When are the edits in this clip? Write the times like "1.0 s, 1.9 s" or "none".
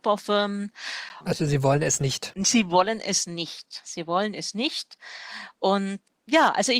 1.2 s